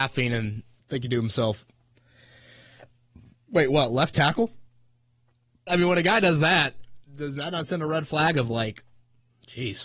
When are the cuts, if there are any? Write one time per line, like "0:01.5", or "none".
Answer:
0:05.7